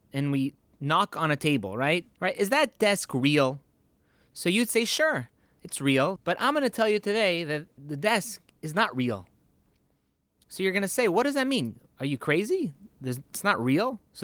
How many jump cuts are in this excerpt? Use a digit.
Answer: 3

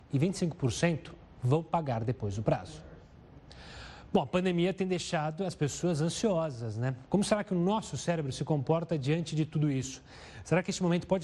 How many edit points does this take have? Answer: 1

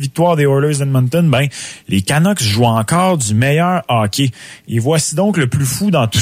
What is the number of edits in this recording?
0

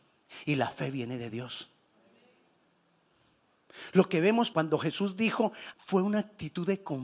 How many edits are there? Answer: 2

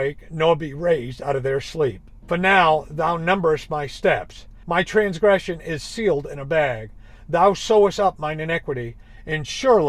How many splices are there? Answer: 2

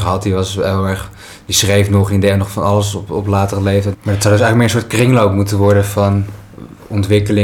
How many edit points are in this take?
1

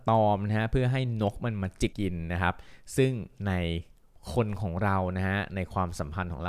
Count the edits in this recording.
1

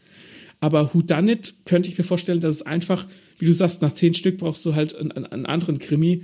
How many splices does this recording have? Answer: 0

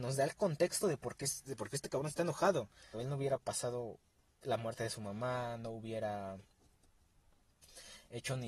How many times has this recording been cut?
1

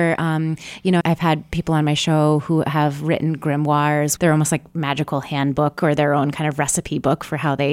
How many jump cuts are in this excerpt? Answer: 2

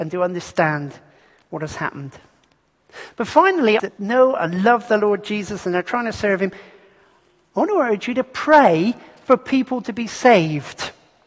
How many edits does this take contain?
1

